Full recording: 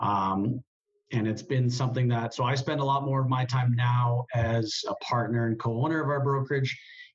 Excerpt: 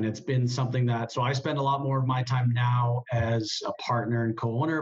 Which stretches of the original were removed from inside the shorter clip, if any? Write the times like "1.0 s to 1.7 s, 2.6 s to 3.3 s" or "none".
none